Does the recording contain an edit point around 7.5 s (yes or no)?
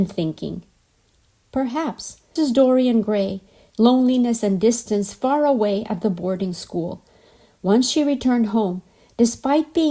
no